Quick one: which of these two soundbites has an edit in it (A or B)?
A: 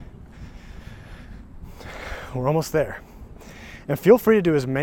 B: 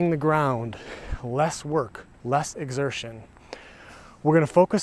B